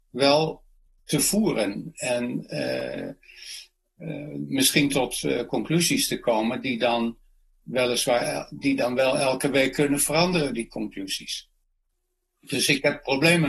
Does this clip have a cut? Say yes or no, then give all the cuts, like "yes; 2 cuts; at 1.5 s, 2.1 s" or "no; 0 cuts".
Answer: no; 0 cuts